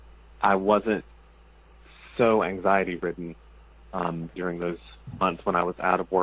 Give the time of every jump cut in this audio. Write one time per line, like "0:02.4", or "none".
0:04.3